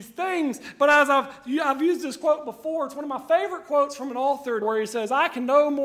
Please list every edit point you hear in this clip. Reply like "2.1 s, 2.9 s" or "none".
4.6 s